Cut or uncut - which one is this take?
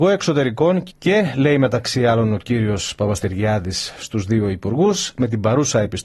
cut